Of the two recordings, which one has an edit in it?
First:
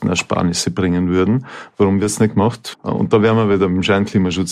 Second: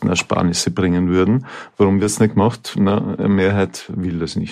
first; 1 cut; at 2.7 s

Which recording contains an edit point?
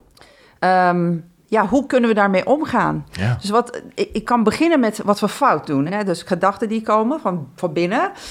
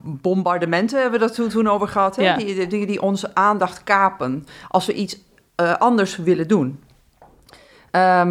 first; 1 cut; at 5.9 s

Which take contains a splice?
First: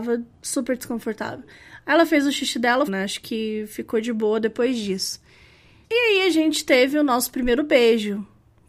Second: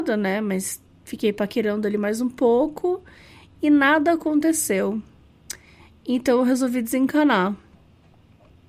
first; 2 cuts; at 2.9 s, 5.8 s

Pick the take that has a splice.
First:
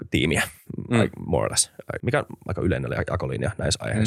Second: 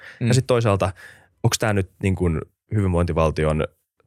first; 1 cut; at 2.0 s

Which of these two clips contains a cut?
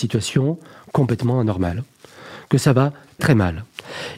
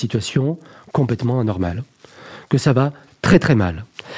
first; 1 cut; at 3.2 s

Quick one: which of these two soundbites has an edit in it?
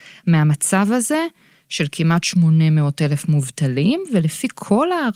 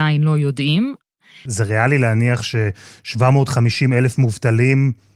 second; 1 cut; at 1.5 s

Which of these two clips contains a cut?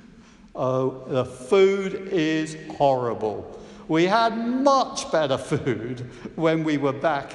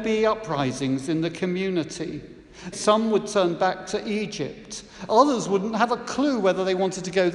second; 2 cuts; at 2.7 s, 5.1 s

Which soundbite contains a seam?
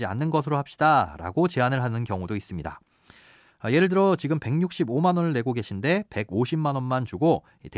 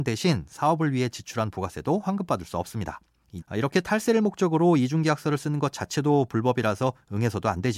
second; 1 cut; at 3.4 s

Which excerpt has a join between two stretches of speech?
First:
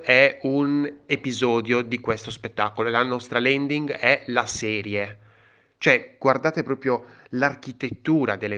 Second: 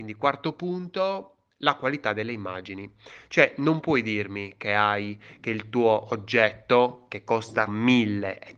second; 1 cut; at 7.7 s

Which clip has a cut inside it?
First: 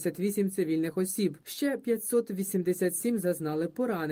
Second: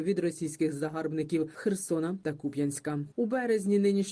second; 1 cut; at 3.1 s

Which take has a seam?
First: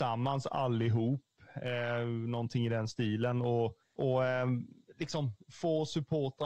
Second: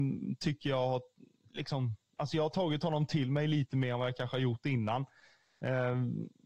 first; 1 cut; at 3.8 s

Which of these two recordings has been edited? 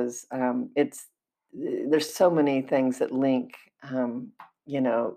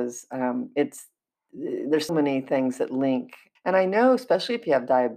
second; 2 cuts; at 2.1 s, 3.6 s

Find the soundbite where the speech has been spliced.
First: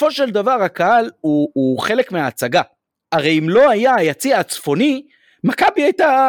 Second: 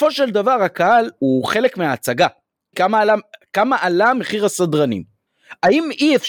second; 2 cuts; at 1.2 s, 2.7 s

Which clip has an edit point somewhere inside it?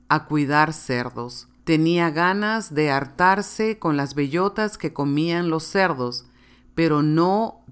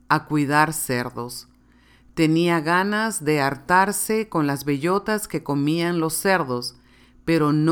first; 1 cut; at 1.6 s

